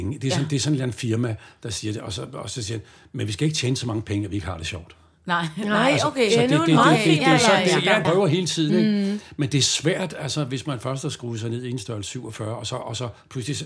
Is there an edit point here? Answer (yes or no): yes